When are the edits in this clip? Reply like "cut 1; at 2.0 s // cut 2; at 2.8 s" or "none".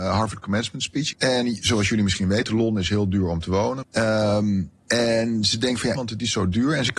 cut 1; at 1.1 s // cut 2; at 3.8 s // cut 3; at 5.9 s

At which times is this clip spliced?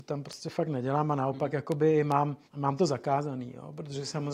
cut 1; at 2.5 s

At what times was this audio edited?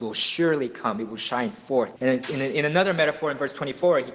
cut 1; at 2.0 s

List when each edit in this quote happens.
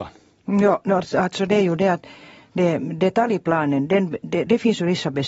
none

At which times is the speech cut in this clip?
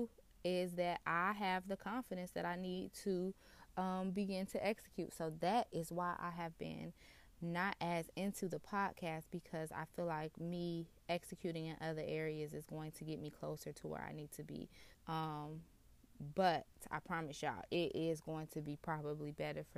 cut 1; at 14.9 s

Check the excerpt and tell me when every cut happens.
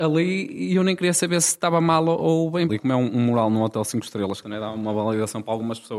cut 1; at 2.7 s // cut 2; at 4.4 s

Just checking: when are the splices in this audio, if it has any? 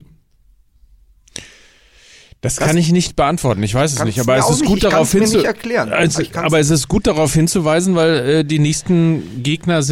none

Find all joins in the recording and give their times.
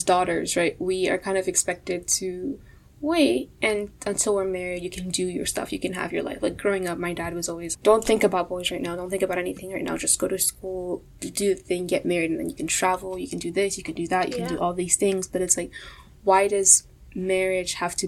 cut 1; at 7.7 s

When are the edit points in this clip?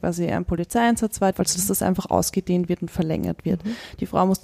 cut 1; at 1.3 s

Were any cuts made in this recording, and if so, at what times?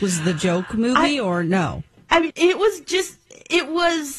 cut 1; at 2.3 s

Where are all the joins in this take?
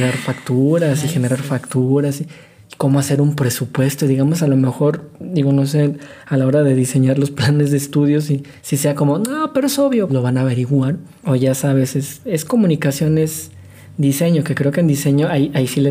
cut 1; at 10.1 s

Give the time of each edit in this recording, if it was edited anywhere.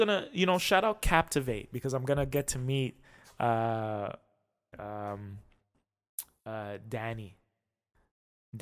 cut 1; at 4.7 s

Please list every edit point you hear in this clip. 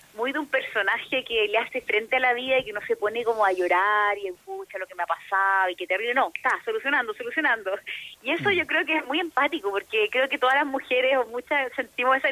none

